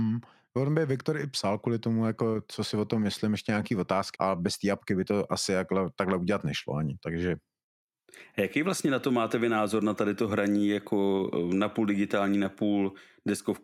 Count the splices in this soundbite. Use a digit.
1